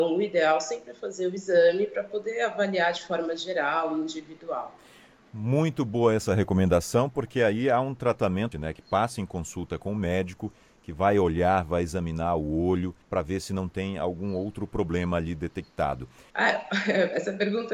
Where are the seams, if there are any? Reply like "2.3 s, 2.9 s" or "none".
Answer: 8.5 s, 13.0 s, 16.3 s